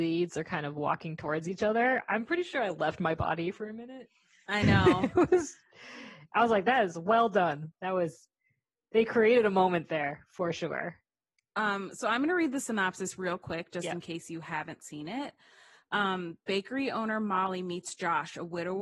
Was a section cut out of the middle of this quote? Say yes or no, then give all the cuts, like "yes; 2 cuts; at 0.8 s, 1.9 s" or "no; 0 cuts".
yes; 1 cut; at 7.7 s